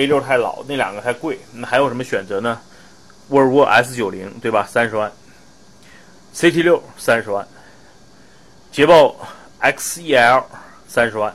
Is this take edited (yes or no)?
no